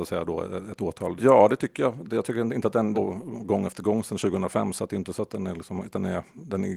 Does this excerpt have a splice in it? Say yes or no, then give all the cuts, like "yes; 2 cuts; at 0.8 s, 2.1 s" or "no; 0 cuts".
yes; 2 cuts; at 1.2 s, 2.9 s